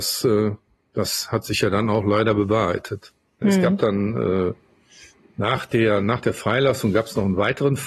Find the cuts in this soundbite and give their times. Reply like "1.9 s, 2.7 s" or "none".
3.4 s